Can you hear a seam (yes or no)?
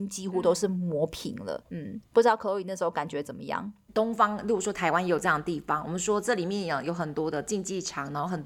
yes